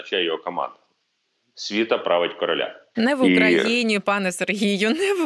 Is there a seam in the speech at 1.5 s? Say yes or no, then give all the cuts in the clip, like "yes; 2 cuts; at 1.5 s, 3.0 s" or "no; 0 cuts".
no; 1 cut; at 2.9 s